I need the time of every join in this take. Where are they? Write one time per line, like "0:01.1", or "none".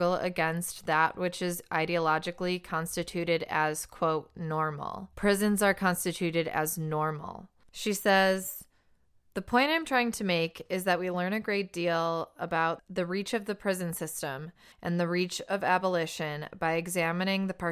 0:05.1
0:07.6
0:14.7